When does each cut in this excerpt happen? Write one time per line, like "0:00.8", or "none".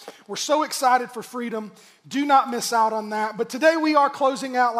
none